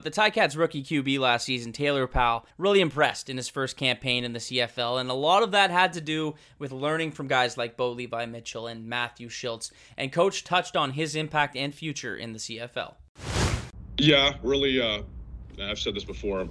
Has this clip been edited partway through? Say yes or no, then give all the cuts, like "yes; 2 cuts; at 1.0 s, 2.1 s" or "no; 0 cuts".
no; 0 cuts